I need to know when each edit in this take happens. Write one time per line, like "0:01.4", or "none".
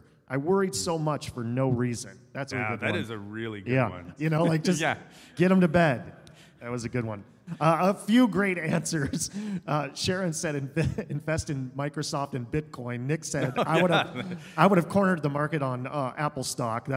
0:02.5
0:04.2